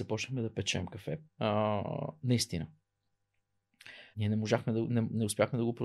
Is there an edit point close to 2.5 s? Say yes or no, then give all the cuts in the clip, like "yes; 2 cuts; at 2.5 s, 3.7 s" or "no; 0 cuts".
no; 2 cuts; at 1.3 s, 4.1 s